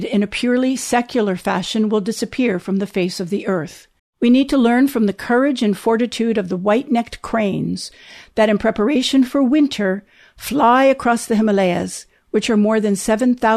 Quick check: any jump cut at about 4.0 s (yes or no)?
yes